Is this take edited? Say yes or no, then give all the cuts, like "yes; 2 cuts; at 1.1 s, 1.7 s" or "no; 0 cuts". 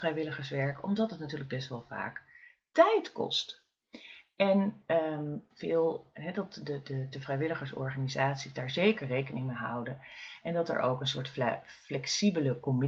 yes; 2 cuts; at 5.5 s, 7.1 s